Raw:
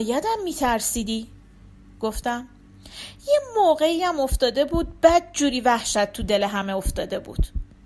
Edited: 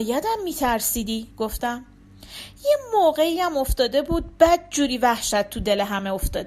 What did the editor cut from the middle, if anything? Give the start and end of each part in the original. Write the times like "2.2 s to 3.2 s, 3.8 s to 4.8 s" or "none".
1.3 s to 1.9 s